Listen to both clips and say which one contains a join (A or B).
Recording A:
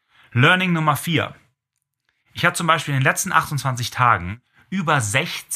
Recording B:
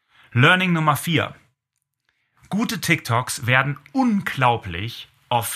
A